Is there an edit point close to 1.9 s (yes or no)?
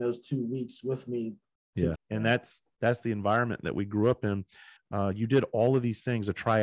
yes